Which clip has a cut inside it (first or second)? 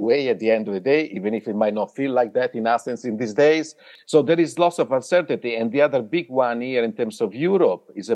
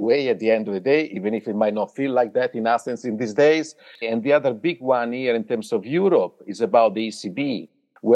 second